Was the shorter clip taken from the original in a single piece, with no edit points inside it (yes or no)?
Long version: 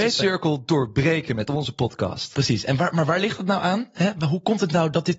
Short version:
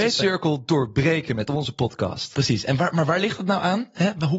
yes